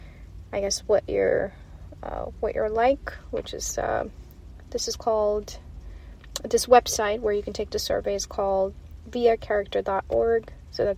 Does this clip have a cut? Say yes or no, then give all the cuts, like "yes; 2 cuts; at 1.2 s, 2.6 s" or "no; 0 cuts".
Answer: no; 0 cuts